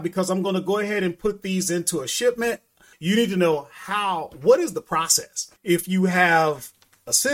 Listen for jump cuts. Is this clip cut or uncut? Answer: cut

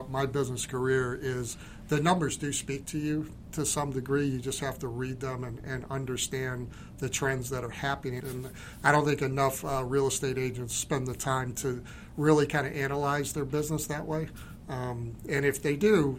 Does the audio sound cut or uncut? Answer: cut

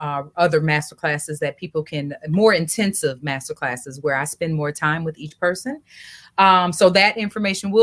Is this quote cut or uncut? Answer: uncut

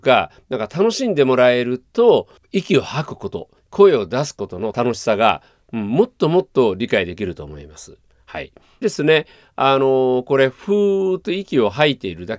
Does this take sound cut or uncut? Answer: cut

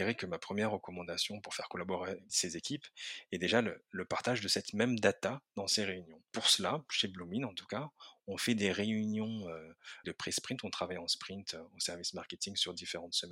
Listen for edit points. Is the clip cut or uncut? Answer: cut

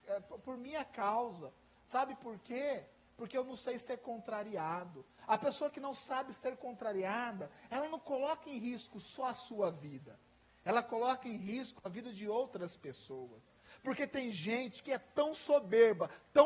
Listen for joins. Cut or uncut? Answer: uncut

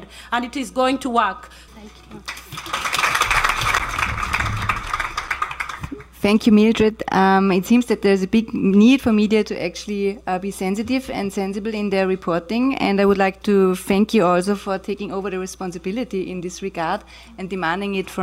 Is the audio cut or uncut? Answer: cut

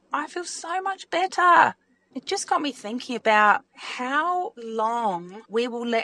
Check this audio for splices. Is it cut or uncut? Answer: uncut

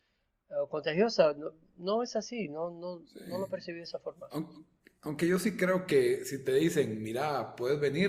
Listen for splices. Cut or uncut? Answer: uncut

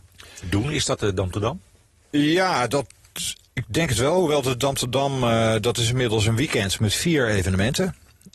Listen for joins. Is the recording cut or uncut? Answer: uncut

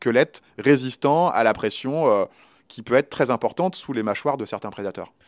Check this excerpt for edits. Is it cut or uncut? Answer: uncut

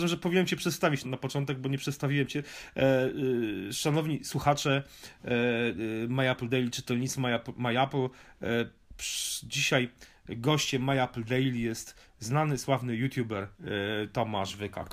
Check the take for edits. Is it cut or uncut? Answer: cut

